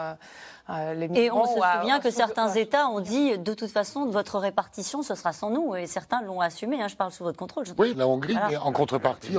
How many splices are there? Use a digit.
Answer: 1